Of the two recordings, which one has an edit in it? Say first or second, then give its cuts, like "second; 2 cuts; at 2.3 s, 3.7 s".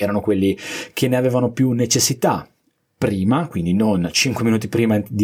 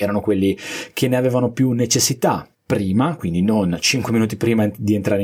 second; 1 cut; at 2.5 s